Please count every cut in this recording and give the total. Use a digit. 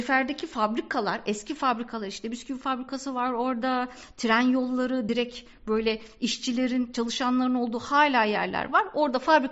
0